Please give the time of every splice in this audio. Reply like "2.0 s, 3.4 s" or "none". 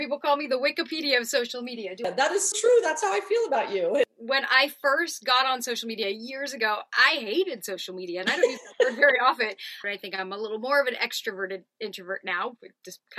2.5 s, 9.8 s